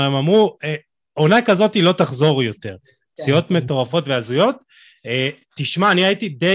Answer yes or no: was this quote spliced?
no